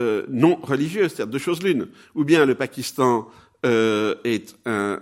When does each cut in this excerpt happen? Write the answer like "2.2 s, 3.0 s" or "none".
none